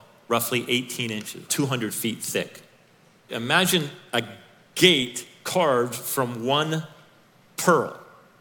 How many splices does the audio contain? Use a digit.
2